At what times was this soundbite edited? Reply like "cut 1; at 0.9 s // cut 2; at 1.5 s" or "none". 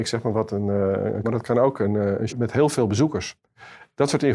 cut 1; at 1.2 s // cut 2; at 2.3 s